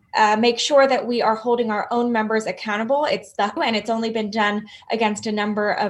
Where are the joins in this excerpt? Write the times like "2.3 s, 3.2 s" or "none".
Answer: 3.6 s